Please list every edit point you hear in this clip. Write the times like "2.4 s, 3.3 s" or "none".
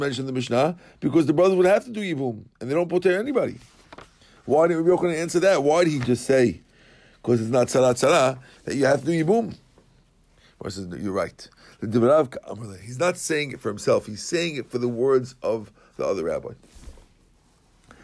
8.6 s